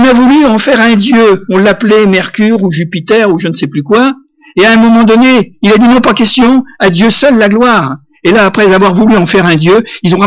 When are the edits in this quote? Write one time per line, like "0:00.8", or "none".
0:08.4